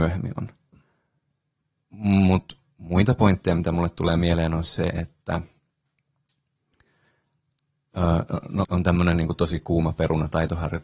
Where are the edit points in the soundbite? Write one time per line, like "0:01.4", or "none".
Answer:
0:08.6